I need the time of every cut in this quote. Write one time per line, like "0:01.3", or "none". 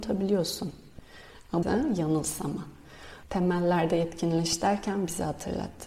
0:01.6
0:03.2